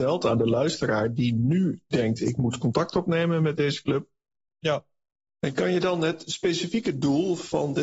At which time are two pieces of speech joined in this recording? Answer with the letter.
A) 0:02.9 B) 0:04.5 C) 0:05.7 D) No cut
B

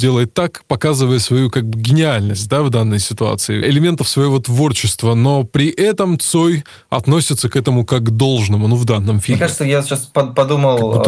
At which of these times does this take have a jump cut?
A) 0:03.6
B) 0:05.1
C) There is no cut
A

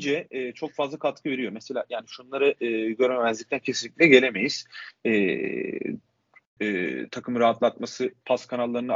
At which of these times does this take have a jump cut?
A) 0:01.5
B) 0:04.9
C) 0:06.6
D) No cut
C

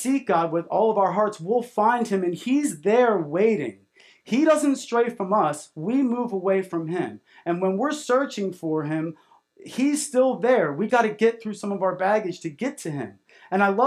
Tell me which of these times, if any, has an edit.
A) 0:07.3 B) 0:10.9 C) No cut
B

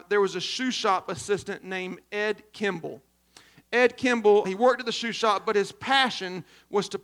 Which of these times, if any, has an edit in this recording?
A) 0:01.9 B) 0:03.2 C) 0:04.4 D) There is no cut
C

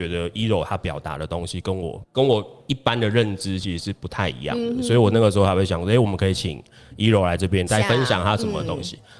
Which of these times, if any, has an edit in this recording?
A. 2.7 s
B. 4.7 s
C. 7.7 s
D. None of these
C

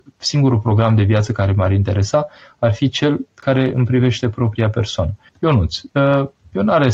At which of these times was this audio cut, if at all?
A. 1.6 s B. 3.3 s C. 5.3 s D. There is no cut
C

